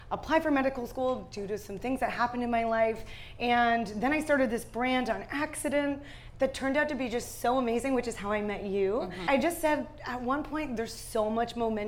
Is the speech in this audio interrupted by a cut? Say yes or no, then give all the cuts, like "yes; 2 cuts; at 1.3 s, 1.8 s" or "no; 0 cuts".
no; 0 cuts